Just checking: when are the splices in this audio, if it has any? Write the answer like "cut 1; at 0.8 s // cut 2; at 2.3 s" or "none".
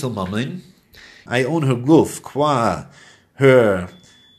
cut 1; at 1.3 s

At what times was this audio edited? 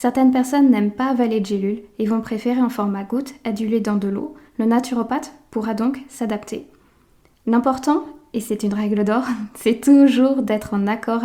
none

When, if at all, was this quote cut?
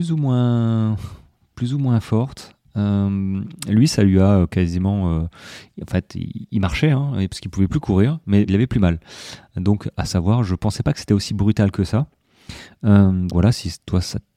cut 1; at 8.5 s // cut 2; at 13.3 s

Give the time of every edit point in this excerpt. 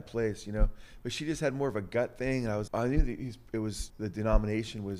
cut 1; at 2.7 s // cut 2; at 3.9 s

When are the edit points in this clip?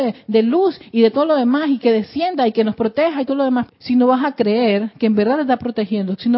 cut 1; at 3.7 s

